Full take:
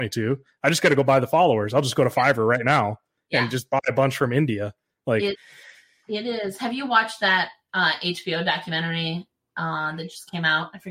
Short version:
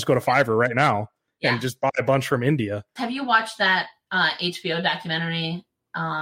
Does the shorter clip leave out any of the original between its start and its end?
yes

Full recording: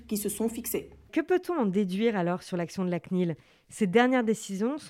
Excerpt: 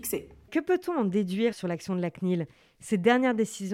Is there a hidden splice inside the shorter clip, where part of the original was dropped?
yes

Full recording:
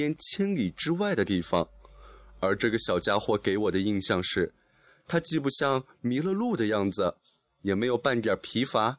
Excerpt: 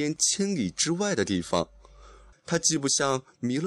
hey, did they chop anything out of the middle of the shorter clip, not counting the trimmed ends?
yes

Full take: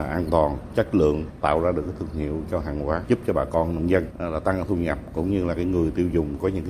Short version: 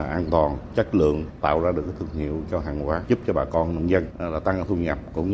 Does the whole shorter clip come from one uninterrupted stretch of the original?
yes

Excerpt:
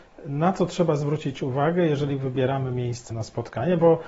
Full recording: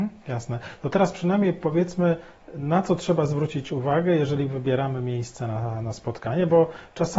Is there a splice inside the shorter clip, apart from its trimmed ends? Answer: yes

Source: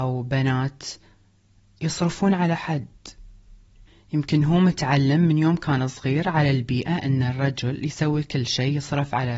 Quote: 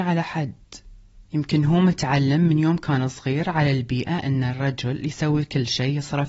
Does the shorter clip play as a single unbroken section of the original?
no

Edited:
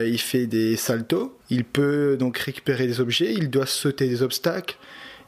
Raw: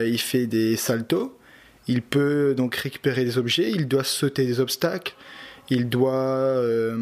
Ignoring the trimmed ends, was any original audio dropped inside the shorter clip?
yes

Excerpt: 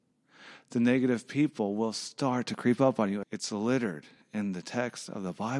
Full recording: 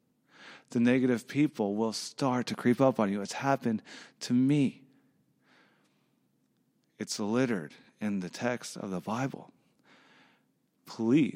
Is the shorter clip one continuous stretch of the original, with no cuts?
no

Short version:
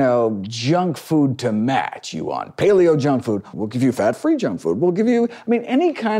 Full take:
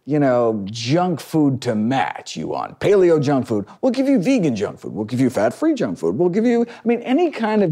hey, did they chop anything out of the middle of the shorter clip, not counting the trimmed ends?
yes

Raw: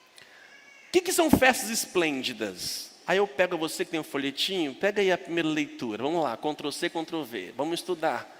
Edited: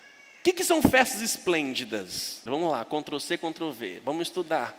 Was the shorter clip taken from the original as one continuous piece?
no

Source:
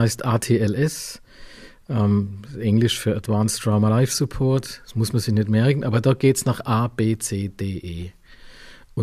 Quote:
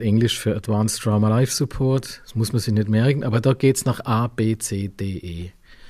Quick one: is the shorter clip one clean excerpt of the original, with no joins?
yes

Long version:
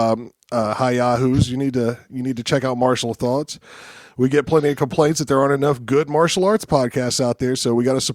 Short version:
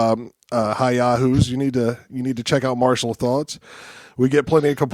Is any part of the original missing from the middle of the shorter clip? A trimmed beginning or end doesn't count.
no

